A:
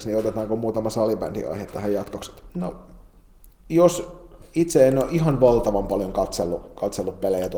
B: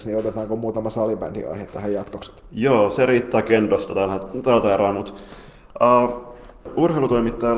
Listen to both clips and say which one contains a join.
A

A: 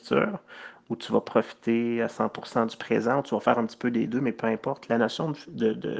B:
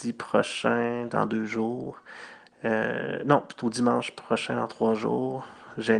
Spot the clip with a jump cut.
B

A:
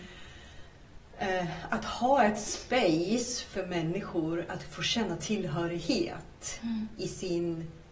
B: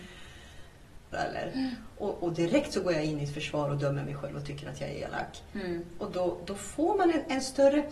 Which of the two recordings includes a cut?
B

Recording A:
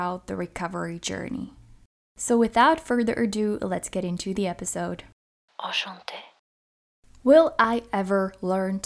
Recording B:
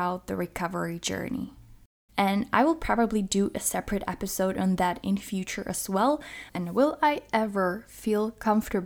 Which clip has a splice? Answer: B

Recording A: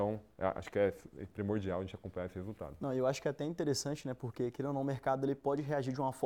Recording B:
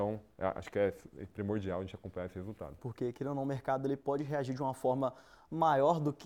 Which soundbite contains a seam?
B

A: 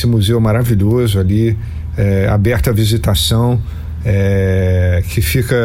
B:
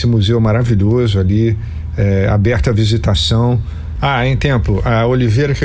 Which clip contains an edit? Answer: B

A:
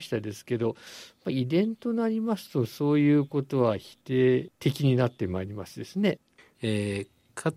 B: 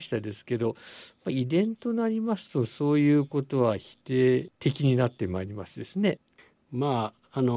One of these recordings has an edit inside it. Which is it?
A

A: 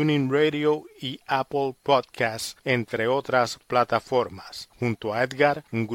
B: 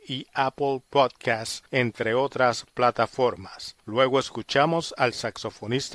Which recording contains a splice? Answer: A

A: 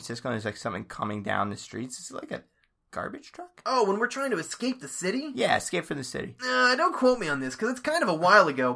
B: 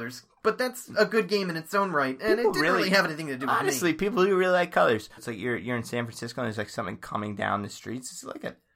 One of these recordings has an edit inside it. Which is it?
B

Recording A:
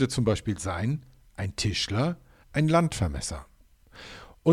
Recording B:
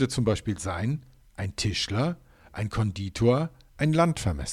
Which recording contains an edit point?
A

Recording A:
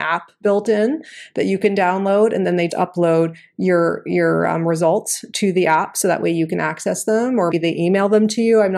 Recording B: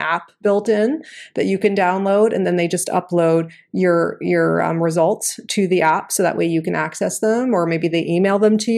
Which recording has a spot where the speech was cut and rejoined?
A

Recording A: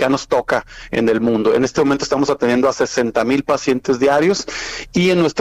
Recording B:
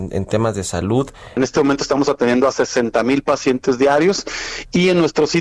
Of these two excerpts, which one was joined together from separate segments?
B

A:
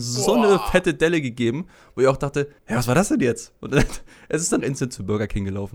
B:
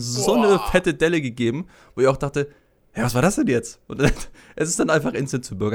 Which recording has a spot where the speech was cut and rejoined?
A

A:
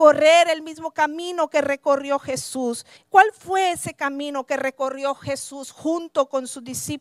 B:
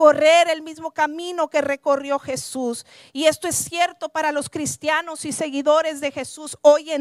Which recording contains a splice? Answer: A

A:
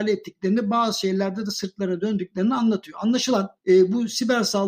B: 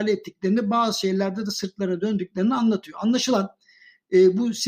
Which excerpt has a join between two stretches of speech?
A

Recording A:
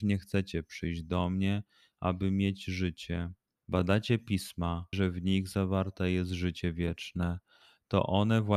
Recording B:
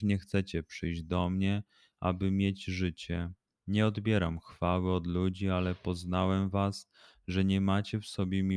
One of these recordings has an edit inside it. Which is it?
A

